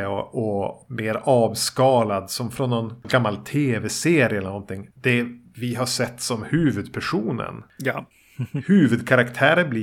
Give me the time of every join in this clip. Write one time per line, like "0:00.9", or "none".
0:03.0
0:04.9